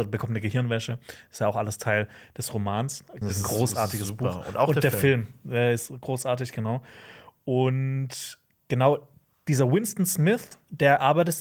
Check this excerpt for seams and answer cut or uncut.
cut